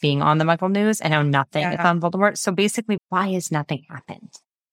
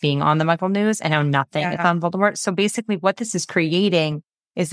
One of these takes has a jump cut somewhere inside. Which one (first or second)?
first